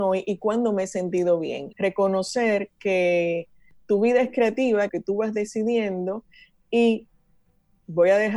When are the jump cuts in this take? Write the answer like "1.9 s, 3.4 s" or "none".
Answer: 1.7 s, 4.9 s